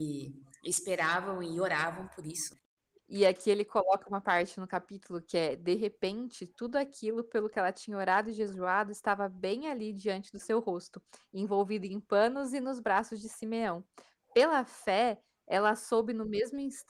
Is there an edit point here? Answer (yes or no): no